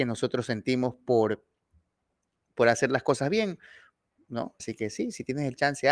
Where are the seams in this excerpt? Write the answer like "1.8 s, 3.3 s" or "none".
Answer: 4.6 s